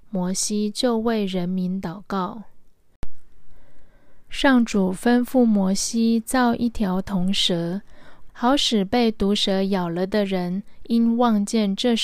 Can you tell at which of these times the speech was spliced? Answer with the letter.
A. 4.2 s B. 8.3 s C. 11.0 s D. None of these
B